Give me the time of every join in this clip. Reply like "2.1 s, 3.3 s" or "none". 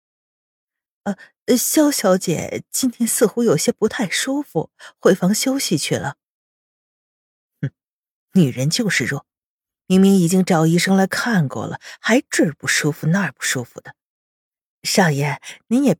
none